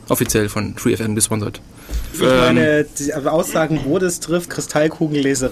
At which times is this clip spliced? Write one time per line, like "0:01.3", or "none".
0:02.1
0:04.5